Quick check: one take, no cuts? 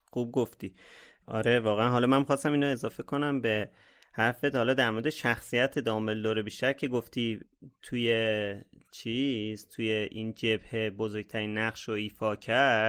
yes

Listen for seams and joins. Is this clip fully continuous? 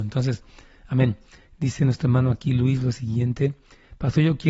yes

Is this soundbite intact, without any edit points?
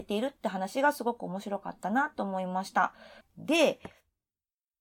no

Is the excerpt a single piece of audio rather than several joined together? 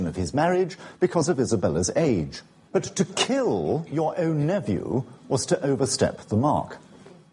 no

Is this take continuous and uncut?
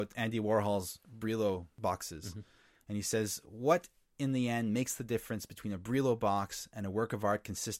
yes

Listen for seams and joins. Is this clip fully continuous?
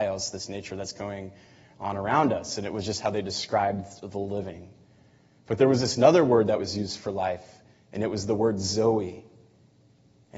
yes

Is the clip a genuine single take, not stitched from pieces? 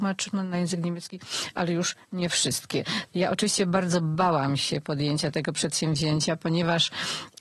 no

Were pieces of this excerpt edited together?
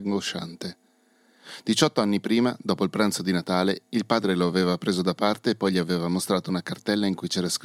no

